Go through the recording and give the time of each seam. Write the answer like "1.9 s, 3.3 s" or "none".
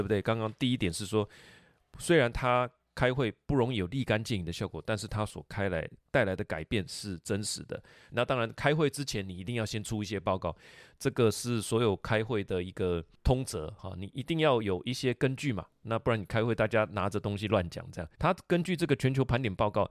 8.1 s, 18.1 s